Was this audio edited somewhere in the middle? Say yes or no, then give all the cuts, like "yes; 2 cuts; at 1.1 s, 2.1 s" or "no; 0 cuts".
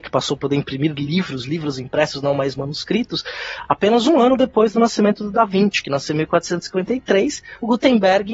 no; 0 cuts